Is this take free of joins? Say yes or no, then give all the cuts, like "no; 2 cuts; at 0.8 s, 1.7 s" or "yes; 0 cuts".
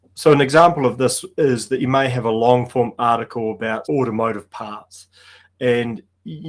no; 1 cut; at 3.8 s